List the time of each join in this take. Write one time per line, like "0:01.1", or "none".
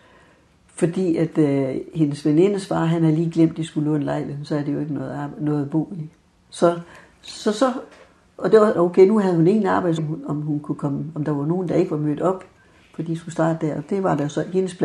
0:08.7
0:10.0